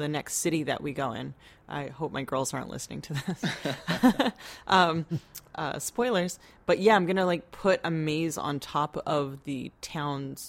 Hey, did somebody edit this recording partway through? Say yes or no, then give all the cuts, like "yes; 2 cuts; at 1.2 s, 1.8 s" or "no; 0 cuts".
no; 0 cuts